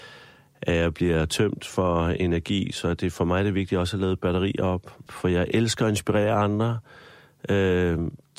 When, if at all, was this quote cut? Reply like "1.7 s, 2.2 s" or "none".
5.1 s